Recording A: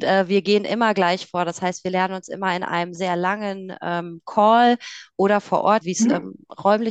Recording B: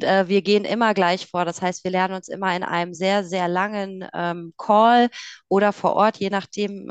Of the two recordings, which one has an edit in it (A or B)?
A